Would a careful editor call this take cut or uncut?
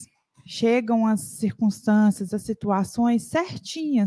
cut